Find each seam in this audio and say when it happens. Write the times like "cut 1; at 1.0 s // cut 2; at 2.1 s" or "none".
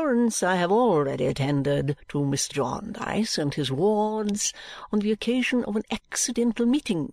cut 1; at 2.5 s